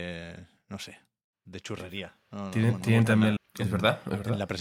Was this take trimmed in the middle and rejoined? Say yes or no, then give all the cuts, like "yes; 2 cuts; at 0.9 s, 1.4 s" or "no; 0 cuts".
yes; 1 cut; at 3.4 s